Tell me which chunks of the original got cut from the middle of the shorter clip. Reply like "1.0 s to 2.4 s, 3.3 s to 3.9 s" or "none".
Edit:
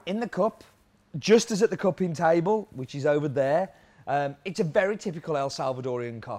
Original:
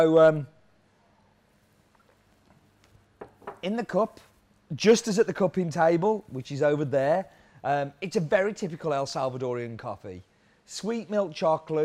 none